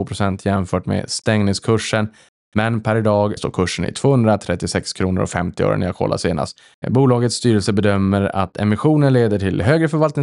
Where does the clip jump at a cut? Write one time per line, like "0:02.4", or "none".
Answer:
0:03.4
0:06.8